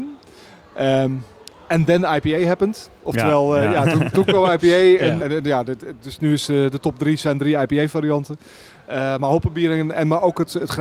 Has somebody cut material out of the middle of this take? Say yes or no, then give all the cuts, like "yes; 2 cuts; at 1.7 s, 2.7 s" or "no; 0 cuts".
yes; 1 cut; at 5.2 s